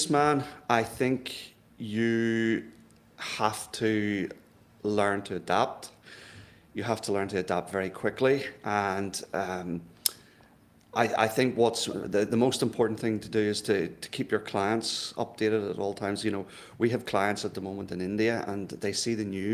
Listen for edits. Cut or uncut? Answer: uncut